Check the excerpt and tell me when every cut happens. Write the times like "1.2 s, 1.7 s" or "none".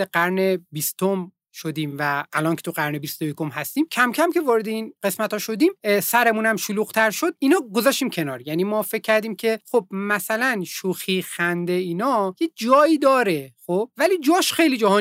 none